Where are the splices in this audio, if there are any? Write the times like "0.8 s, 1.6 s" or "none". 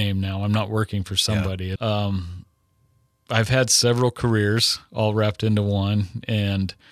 1.8 s